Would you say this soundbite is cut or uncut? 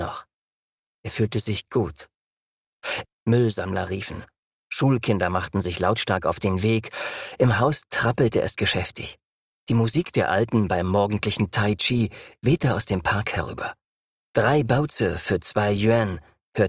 cut